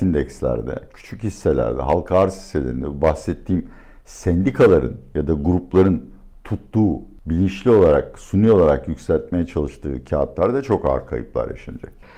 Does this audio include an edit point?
no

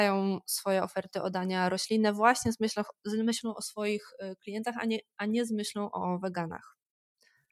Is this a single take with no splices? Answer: yes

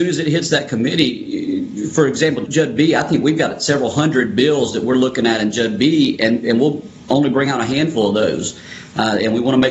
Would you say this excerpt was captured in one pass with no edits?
no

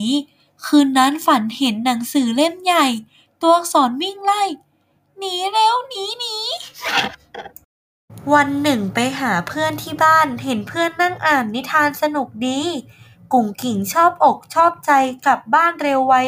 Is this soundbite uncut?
yes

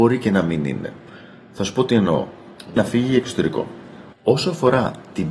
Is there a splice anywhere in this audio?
yes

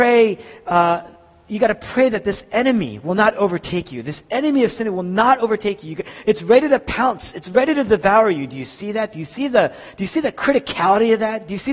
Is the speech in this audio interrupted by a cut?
no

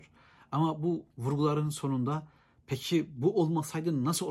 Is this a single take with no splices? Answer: no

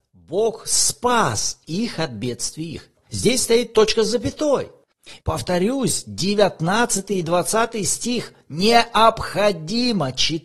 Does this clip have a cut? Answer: yes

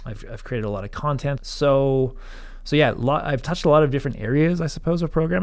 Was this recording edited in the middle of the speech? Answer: yes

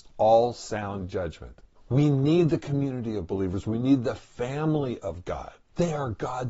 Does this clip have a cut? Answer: yes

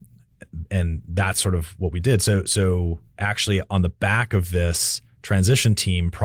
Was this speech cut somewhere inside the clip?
no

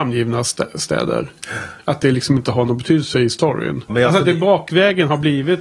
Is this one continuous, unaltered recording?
no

